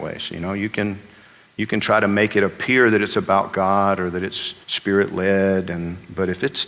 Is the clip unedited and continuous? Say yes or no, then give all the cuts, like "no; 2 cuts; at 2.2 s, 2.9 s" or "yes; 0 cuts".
no; 1 cut; at 4.6 s